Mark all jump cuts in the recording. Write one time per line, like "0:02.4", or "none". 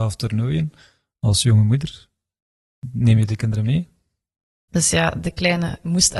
0:04.7